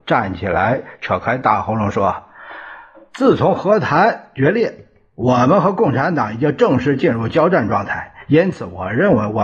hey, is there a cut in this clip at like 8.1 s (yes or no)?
no